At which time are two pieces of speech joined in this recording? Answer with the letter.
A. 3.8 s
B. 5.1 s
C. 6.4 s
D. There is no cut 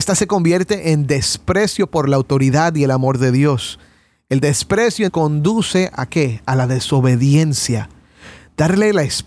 B